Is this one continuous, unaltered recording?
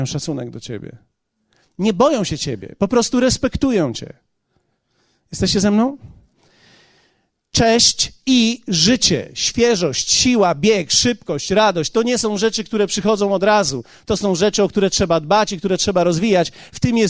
yes; 0 cuts

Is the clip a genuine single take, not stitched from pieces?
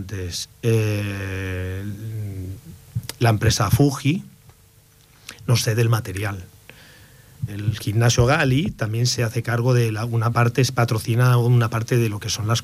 no; 2 cuts; at 7.5 s, 10.3 s

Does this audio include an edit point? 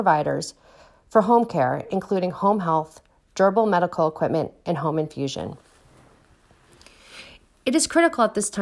no; 0 cuts

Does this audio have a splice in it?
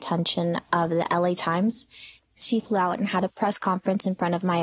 yes; 1 cut; at 2.2 s

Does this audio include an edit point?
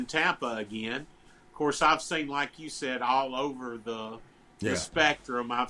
no; 0 cuts

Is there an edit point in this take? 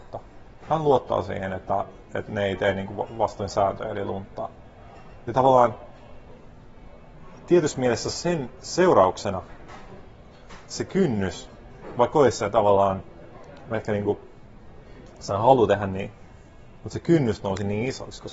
yes; 1 cut; at 13.7 s

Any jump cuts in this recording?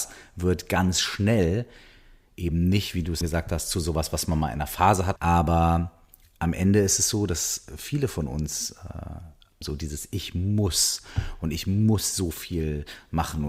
yes; 3 cuts; at 3.2 s, 5.2 s, 9.6 s

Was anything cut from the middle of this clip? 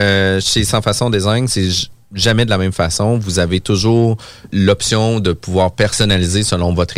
yes; 1 cut; at 4.5 s

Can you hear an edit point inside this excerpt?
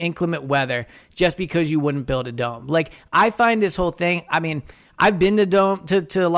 no; 0 cuts

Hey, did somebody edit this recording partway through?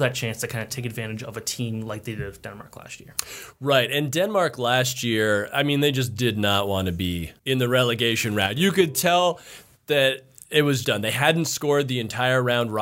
yes; 2 cuts; at 7.4 s, 10.8 s

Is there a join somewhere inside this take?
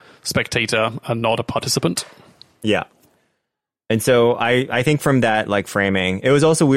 no; 0 cuts

